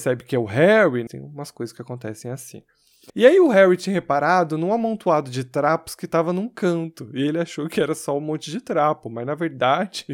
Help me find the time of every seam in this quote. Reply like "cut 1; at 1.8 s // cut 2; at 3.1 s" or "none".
cut 1; at 1.1 s // cut 2; at 3.1 s